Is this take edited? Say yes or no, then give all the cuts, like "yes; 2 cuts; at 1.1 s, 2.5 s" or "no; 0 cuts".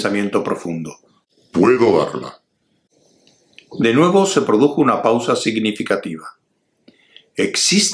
no; 0 cuts